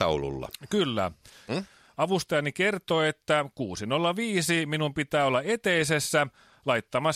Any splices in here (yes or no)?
yes